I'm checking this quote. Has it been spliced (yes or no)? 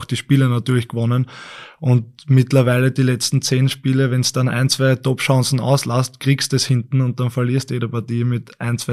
no